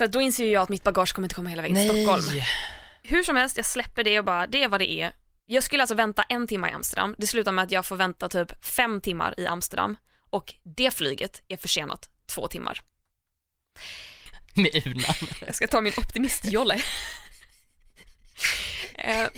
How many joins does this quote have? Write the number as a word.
one